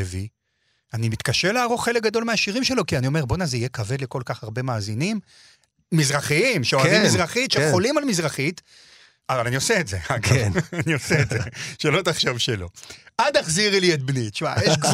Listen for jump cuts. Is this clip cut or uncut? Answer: uncut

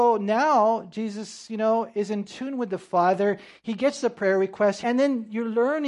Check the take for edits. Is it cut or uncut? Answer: cut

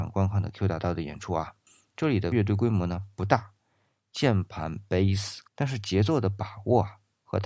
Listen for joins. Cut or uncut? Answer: cut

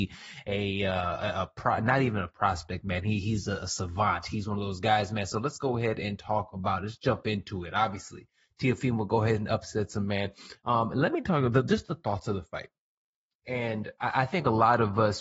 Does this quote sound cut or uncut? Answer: uncut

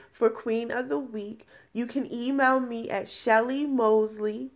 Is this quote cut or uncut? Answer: uncut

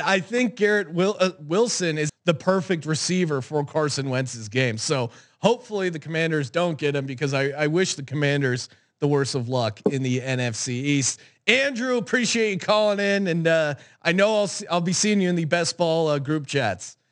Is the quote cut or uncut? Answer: cut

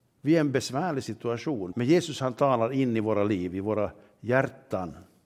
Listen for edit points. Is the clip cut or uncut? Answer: cut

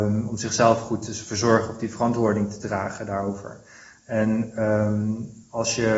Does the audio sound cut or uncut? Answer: uncut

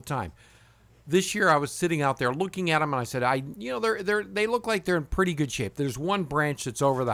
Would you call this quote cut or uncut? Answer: cut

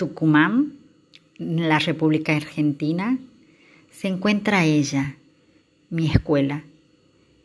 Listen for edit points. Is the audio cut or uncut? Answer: uncut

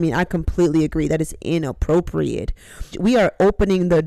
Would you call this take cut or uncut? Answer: cut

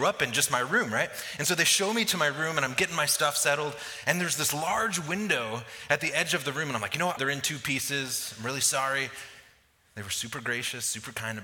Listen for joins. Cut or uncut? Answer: cut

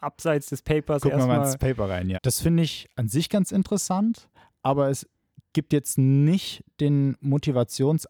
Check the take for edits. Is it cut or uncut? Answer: cut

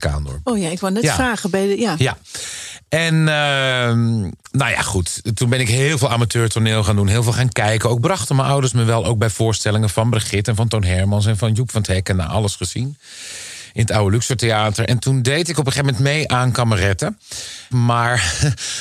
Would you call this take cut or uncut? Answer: cut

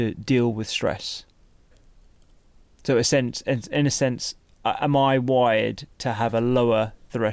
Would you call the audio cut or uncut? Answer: uncut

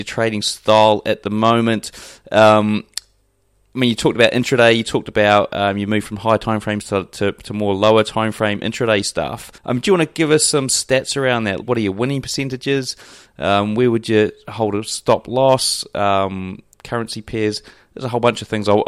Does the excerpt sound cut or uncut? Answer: cut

